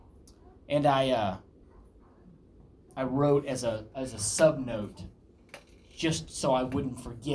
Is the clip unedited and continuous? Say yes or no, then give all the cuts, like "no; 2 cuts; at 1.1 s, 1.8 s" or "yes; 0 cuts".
yes; 0 cuts